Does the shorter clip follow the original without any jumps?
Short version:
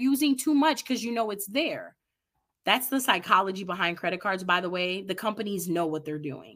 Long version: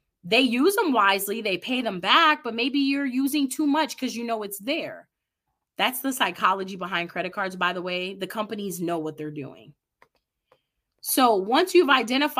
yes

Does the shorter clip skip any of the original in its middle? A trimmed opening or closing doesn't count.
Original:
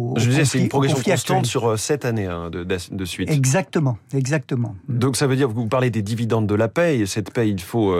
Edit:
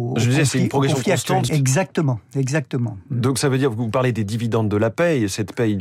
yes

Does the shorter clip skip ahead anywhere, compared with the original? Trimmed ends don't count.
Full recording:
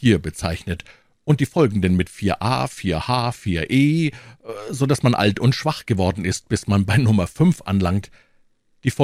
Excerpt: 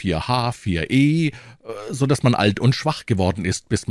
no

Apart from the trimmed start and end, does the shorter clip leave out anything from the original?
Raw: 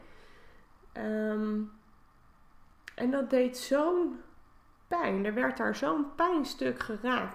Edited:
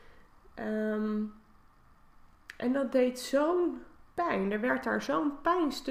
yes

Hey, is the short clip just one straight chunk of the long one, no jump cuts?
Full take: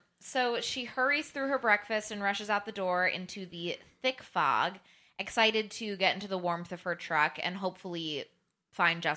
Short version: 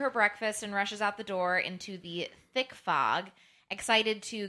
yes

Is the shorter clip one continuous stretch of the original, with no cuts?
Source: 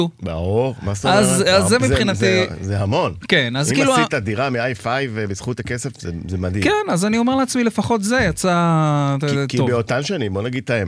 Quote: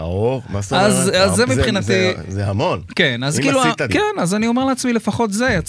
no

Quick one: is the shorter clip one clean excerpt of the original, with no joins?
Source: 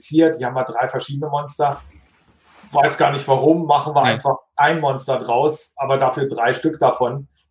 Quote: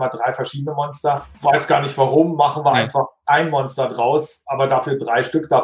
no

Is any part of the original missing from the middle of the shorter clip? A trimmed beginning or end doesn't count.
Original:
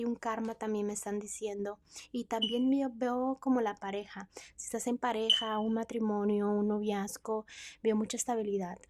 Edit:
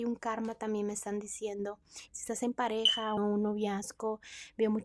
yes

